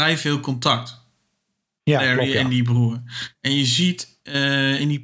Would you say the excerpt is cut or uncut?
uncut